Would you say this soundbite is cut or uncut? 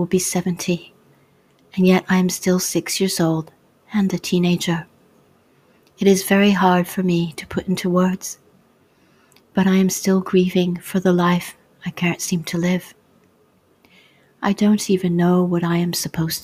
uncut